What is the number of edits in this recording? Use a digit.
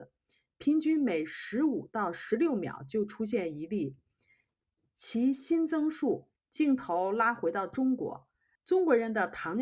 2